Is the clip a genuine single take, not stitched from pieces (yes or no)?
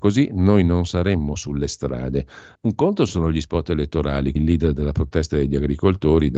no